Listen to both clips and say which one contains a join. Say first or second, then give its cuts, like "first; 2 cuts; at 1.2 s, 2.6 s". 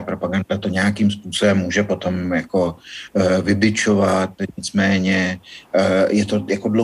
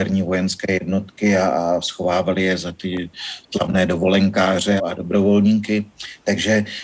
second; 1 cut; at 4.8 s